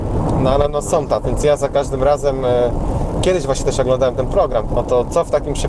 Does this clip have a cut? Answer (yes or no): yes